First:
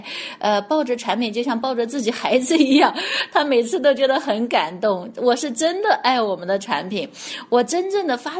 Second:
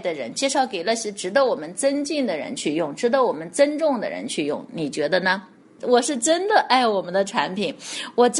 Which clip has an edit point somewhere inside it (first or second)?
second